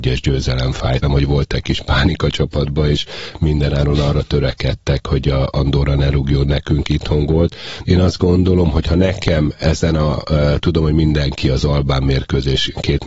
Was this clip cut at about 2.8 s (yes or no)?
no